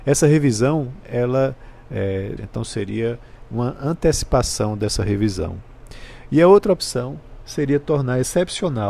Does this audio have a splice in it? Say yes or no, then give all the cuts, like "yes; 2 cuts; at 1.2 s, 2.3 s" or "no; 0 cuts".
yes; 1 cut; at 2.4 s